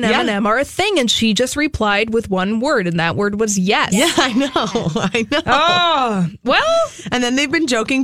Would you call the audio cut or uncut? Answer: uncut